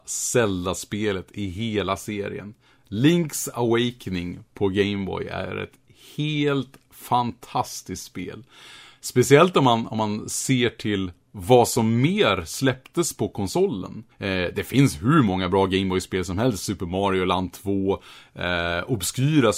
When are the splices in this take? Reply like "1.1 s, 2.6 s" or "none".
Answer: 14.1 s